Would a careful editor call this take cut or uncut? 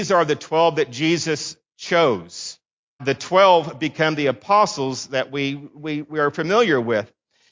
cut